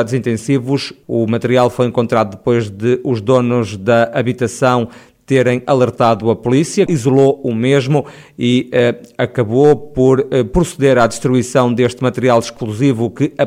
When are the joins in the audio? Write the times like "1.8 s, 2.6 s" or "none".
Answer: 1.0 s, 6.9 s